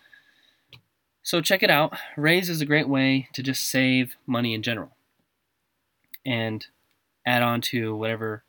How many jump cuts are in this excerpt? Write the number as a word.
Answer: zero